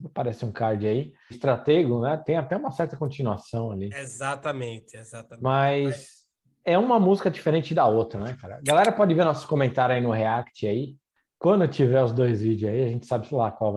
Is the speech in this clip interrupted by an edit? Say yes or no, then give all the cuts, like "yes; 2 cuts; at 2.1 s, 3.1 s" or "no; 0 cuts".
yes; 1 cut; at 1.3 s